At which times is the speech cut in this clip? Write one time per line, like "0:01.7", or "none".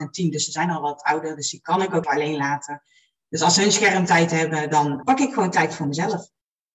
0:02.0
0:05.0